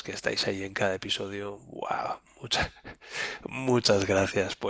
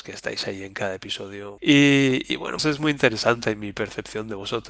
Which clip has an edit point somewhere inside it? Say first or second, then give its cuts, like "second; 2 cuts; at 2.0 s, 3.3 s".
second; 2 cuts; at 1.6 s, 2.6 s